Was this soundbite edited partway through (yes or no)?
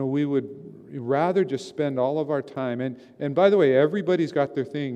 no